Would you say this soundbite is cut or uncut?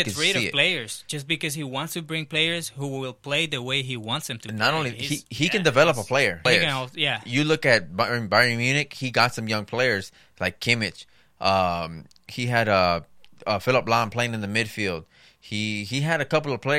cut